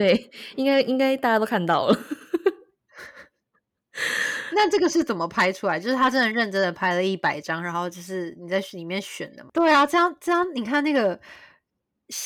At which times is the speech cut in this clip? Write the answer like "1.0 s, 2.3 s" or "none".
9.5 s